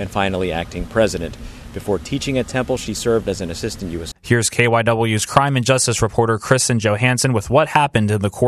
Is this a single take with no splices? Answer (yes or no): no